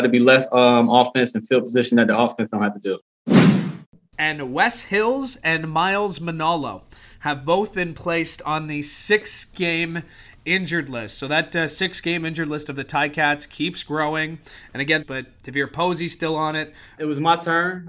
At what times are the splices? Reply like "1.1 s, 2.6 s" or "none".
4.1 s, 15.0 s, 17.0 s